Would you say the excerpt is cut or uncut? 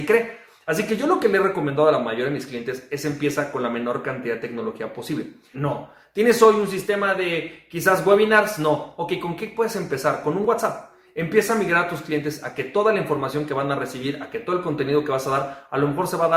cut